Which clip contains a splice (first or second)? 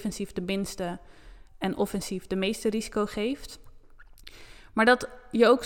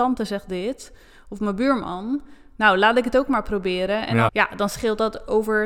second